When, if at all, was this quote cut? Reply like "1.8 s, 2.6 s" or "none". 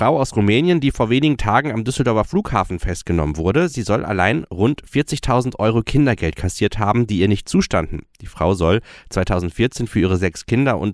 none

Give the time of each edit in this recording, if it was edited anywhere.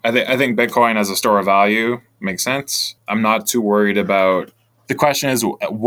4.7 s

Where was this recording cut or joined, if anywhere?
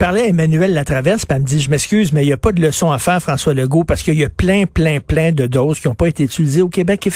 none

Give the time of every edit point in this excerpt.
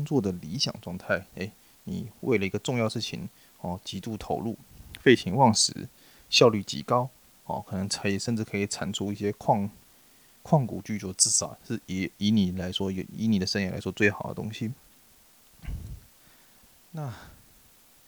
none

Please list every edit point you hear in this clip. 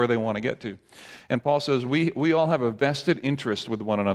none

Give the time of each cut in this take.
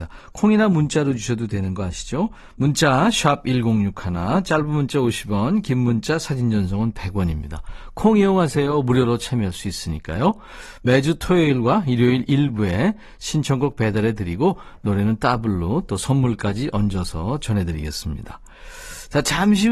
none

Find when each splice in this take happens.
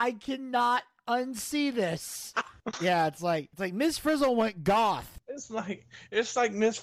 2.3 s

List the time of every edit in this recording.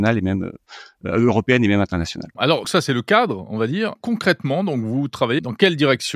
2.6 s

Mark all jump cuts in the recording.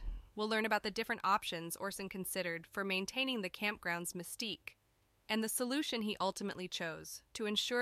none

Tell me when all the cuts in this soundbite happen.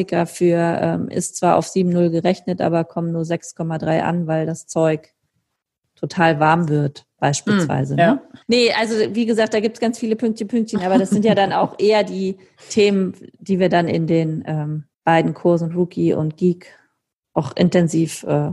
8.4 s, 14.9 s

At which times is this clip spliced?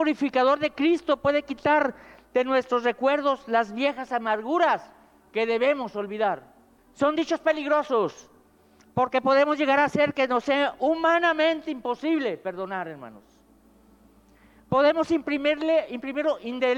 6.8 s

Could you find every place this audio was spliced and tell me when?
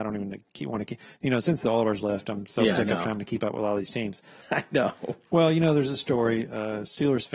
4.4 s

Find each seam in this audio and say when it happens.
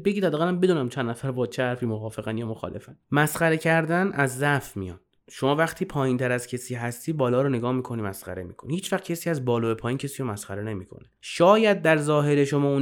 3.0 s, 11.2 s

